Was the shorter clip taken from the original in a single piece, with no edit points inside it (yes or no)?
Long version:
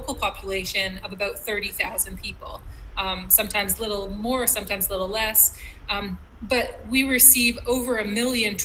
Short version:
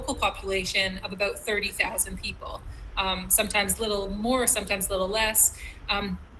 yes